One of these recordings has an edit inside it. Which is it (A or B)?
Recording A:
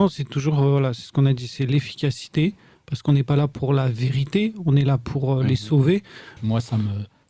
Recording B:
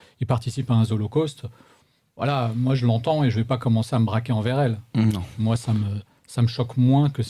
A